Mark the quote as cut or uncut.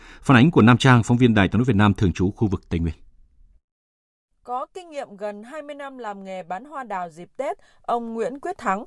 uncut